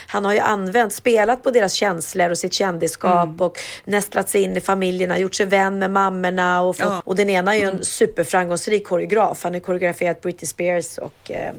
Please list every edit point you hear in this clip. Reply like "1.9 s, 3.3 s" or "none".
7.0 s